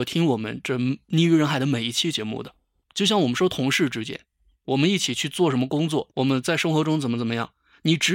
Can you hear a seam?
yes; 2 cuts; at 2.8 s, 6.1 s

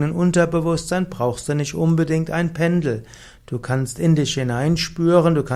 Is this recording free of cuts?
yes; 0 cuts

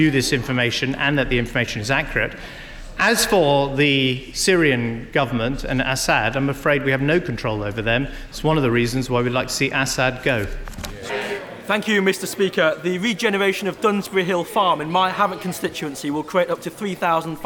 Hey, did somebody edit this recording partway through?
yes; 1 cut; at 11.1 s

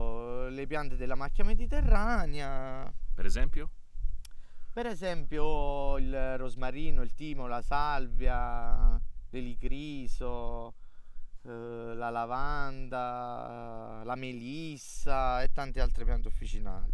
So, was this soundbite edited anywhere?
no; 0 cuts

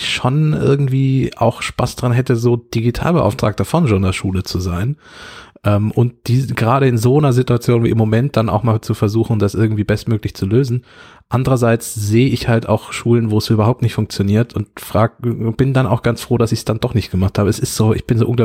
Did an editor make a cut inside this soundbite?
no; 0 cuts

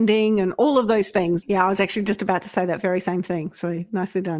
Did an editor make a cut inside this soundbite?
yes; 1 cut; at 1.4 s

